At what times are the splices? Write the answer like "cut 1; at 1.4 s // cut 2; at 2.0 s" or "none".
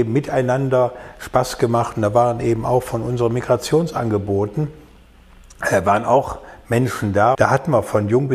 cut 1; at 7.3 s